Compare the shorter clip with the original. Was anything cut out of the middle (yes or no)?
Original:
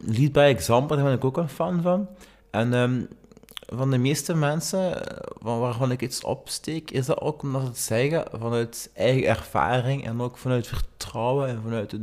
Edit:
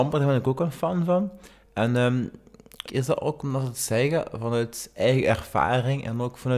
yes